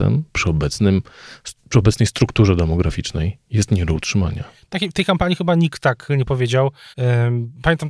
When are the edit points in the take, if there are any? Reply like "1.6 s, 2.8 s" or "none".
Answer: 6.9 s